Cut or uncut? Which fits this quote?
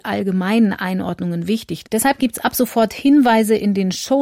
cut